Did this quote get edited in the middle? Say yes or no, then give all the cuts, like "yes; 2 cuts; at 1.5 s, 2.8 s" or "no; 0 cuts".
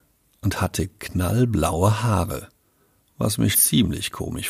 yes; 1 cut; at 3.5 s